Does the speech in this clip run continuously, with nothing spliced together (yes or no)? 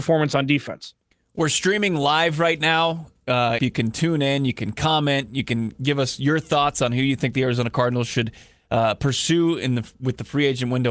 no